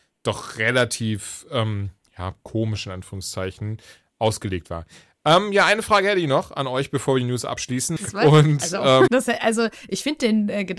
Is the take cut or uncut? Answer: cut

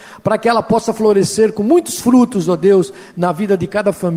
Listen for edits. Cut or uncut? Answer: uncut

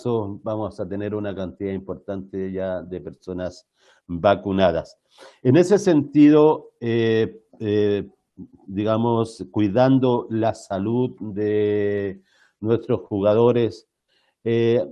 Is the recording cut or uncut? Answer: uncut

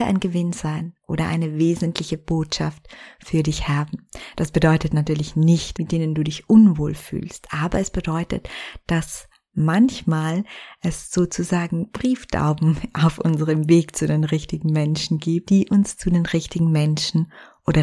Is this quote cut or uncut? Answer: cut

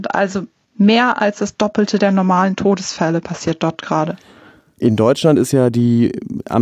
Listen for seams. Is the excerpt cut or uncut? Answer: uncut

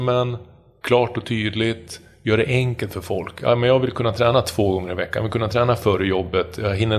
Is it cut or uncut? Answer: uncut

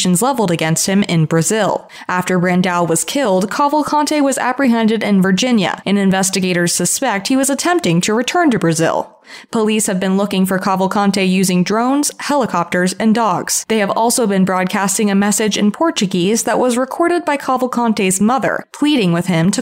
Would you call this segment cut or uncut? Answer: uncut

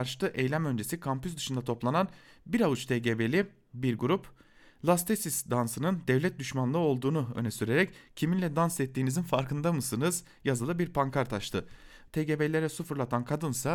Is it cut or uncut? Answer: cut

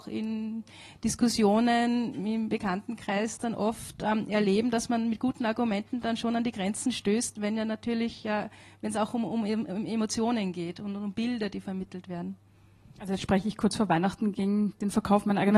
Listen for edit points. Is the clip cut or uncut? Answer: uncut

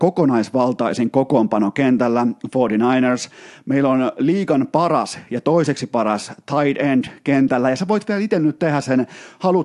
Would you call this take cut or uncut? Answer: uncut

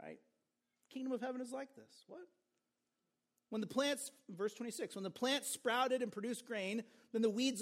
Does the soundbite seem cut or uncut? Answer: uncut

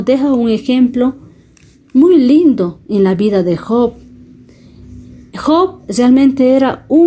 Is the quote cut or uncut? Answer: uncut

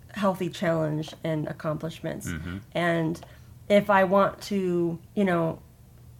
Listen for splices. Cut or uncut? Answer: cut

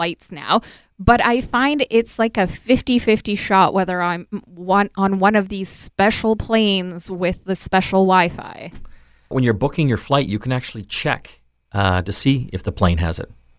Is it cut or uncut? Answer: cut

